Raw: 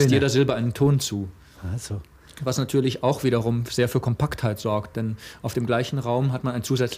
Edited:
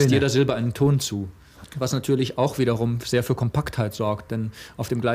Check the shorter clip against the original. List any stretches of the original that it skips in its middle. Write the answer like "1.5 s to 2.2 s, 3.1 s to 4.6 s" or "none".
1.6 s to 2.3 s